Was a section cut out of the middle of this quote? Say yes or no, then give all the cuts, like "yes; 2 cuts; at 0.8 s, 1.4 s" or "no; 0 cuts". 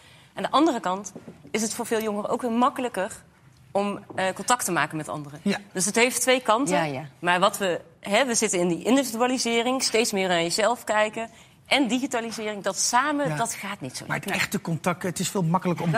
no; 0 cuts